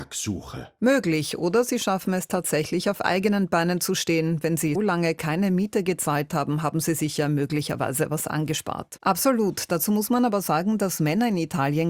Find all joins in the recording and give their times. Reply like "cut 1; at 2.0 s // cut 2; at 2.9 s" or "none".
cut 1; at 4.7 s // cut 2; at 9.0 s